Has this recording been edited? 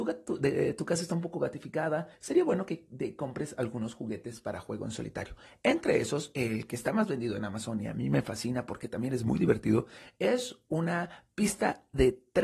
yes; 1 cut; at 2.1 s

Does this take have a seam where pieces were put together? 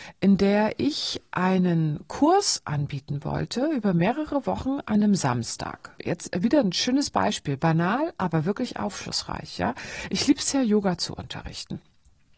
yes; 1 cut; at 6.0 s

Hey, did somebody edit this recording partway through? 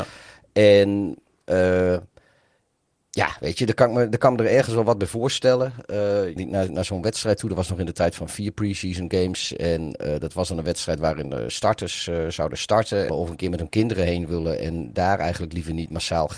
yes; 2 cuts; at 6.4 s, 13.1 s

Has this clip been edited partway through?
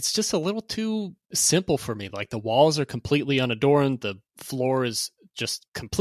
no; 0 cuts

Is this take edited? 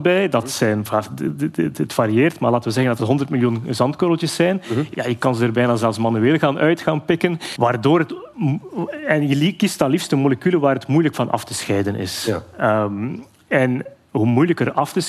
yes; 2 cuts; at 4.9 s, 7.5 s

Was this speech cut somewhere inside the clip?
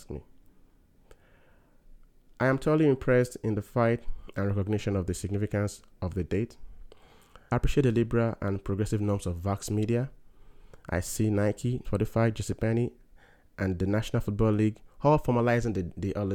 yes; 2 cuts; at 7.5 s, 11.8 s

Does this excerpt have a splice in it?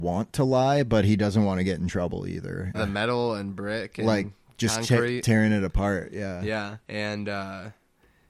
yes; 2 cuts; at 2.7 s, 6.8 s

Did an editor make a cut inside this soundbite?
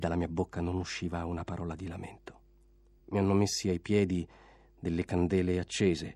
yes; 1 cut; at 3.0 s

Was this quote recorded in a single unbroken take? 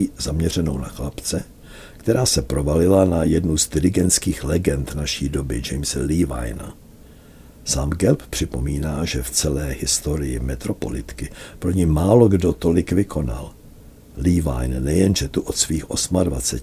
yes; 0 cuts

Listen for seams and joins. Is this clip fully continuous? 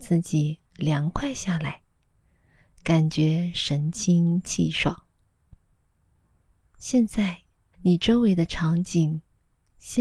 no; 1 cut; at 7.7 s

